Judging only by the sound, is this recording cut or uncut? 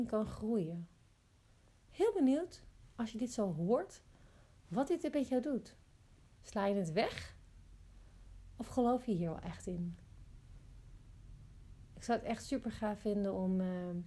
cut